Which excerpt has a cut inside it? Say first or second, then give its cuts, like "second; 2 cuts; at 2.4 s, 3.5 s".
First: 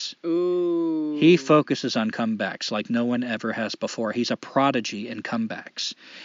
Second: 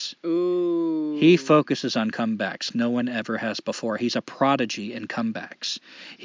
second; 1 cut; at 2.7 s